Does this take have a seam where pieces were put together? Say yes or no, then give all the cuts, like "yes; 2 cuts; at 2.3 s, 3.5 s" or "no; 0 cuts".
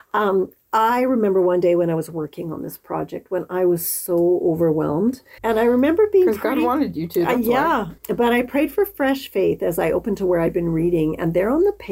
yes; 2 cuts; at 5.4 s, 8.0 s